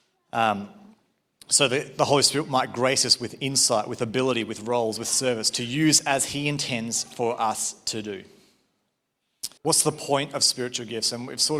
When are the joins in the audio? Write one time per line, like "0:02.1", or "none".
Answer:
0:09.6